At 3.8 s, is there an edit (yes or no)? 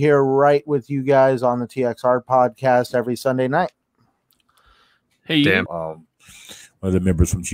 no